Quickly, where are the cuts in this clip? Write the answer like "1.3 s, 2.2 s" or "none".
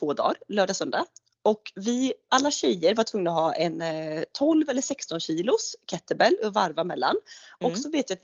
2.3 s